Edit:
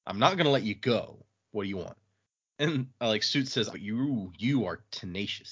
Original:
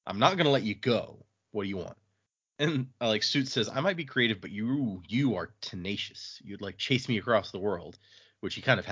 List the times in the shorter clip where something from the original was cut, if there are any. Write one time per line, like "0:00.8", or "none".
0:03.7